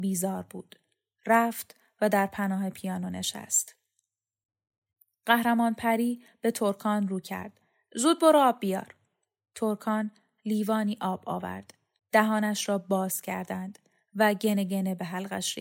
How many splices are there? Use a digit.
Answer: 1